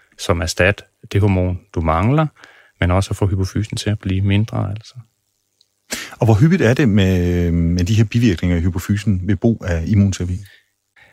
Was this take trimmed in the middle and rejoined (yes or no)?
no